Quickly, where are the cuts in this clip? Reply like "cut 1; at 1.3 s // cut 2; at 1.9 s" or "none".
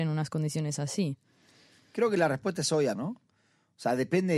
cut 1; at 3.0 s